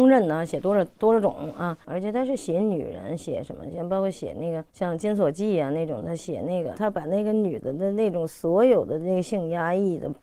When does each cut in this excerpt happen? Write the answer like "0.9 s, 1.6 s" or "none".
4.7 s, 6.7 s